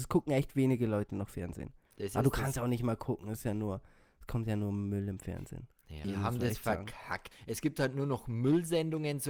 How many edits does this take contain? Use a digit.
2